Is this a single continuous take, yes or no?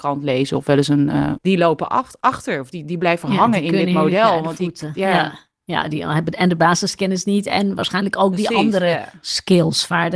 no